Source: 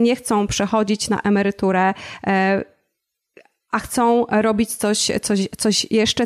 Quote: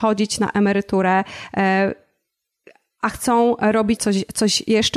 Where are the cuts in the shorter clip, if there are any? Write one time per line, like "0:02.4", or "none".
0:04.0